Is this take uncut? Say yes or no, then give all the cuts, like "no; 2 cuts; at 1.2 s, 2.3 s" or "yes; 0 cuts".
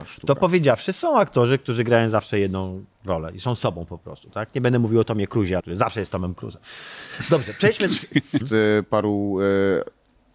no; 2 cuts; at 5.6 s, 8.4 s